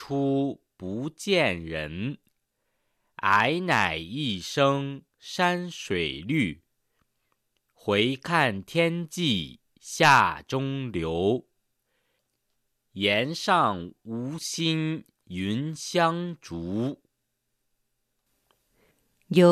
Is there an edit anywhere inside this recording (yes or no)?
no